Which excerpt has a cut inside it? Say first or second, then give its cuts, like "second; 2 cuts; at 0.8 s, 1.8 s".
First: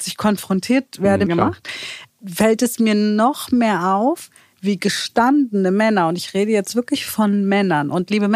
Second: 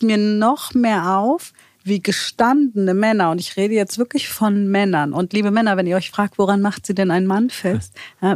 first; 1 cut; at 1.3 s